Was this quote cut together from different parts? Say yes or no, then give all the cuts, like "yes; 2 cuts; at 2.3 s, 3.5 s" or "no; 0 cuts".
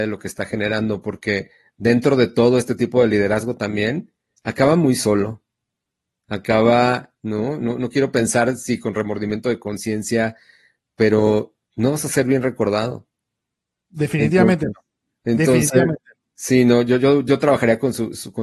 yes; 1 cut; at 11.6 s